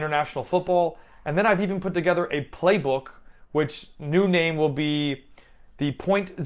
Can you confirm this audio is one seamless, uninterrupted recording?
yes; 0 cuts

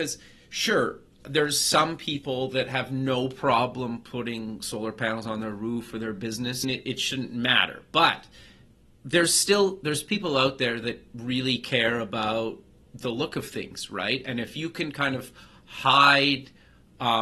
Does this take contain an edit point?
yes; 1 cut; at 6.6 s

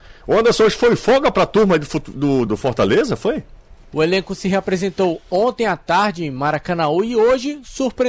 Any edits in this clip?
yes; 2 cuts; at 2.5 s, 3.8 s

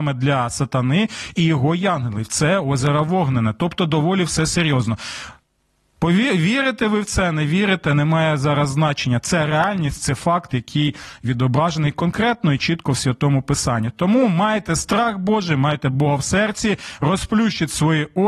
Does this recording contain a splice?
no; 0 cuts

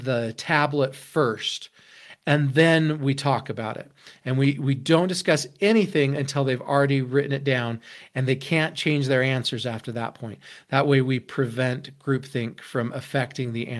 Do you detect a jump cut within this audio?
no; 0 cuts

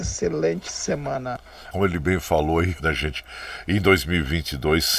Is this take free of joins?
no; 2 cuts; at 1.7 s, 2.8 s

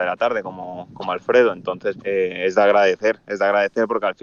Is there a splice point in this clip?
yes; 1 cut; at 2.0 s

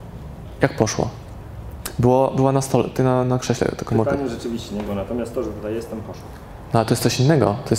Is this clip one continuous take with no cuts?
yes; 0 cuts

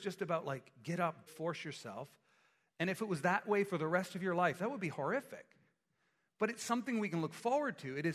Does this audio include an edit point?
yes; 1 cut; at 1.3 s

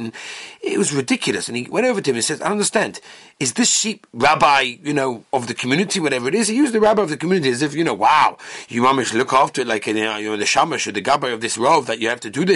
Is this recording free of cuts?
yes; 0 cuts

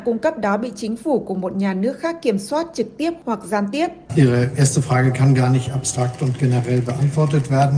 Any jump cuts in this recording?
yes; 1 cut; at 4.1 s

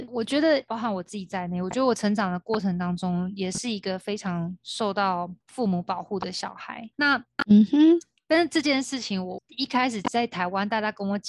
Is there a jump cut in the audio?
yes; 2 cuts; at 5.4 s, 6.9 s

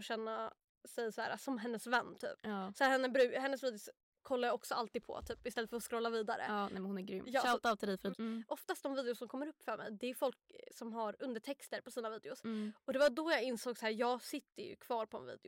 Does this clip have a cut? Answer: yes; 1 cut; at 8.1 s

